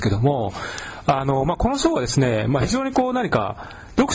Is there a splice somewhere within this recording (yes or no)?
no